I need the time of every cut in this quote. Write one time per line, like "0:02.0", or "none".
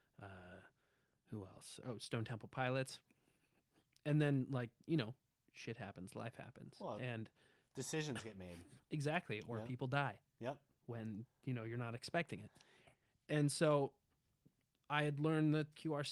0:01.8